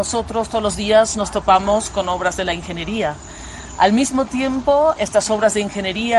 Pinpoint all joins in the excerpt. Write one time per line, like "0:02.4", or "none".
0:05.0